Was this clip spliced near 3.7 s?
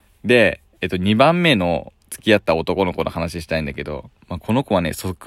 no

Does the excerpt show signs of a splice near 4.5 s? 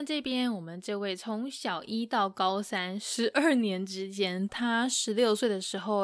yes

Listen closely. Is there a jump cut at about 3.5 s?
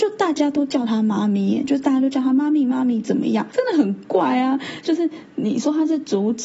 yes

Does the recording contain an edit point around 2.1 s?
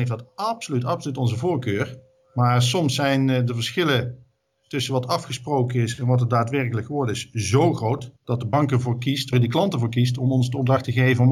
no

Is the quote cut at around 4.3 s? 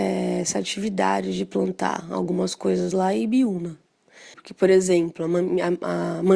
yes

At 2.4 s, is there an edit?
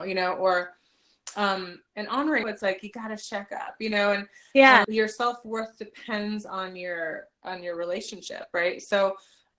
yes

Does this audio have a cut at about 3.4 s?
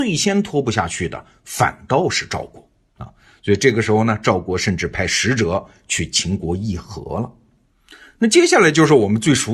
no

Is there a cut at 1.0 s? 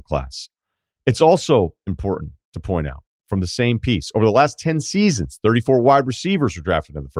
no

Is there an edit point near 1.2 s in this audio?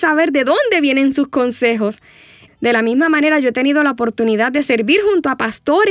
no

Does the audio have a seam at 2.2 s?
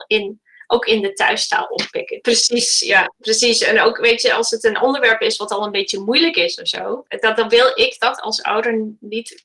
yes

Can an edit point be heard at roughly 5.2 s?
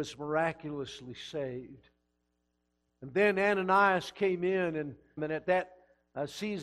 yes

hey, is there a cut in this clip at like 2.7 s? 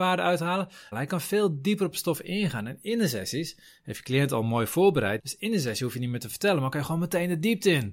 no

